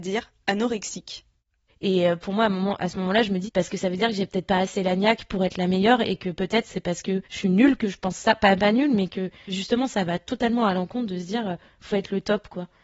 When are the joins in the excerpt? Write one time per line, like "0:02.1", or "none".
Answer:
0:01.7
0:03.4
0:07.2